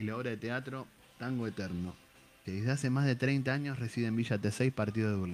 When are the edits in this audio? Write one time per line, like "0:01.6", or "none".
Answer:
0:02.4